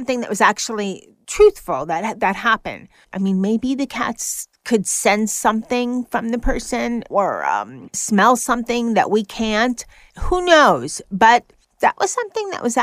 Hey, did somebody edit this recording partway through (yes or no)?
yes